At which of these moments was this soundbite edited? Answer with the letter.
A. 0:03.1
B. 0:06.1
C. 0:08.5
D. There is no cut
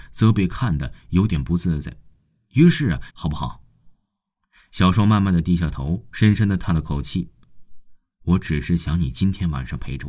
A